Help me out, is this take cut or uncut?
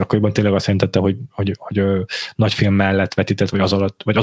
cut